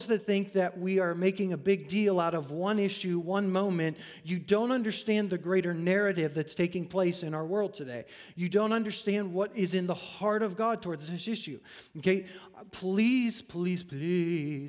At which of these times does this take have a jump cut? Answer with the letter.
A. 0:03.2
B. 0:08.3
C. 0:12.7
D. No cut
D